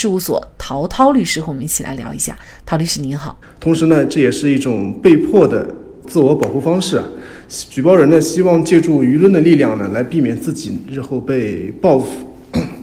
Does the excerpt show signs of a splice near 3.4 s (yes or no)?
yes